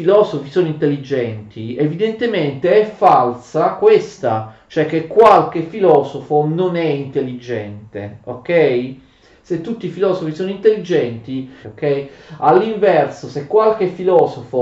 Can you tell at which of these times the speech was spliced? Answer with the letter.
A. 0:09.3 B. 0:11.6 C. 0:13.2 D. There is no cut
B